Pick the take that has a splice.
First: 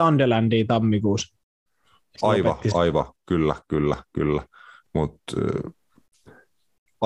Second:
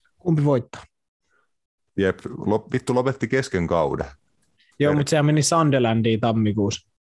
second; 1 cut; at 1.8 s

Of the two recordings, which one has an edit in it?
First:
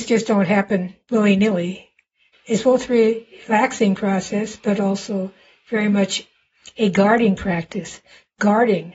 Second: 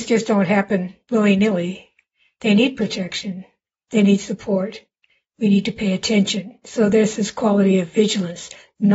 first; 1 cut; at 2.3 s

